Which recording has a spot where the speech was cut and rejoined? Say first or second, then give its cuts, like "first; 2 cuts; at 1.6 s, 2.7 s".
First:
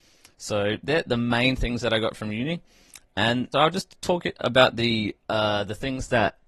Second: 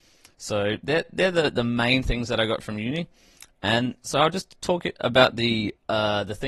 first; 2 cuts; at 1.0 s, 3.5 s